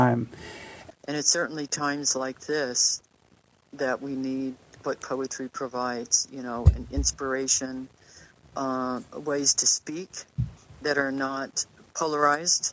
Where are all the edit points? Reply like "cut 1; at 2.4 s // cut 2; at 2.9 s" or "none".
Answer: cut 1; at 0.9 s